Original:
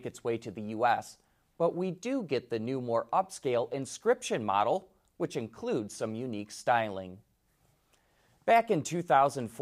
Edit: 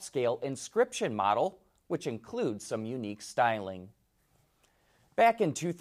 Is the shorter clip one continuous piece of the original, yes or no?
yes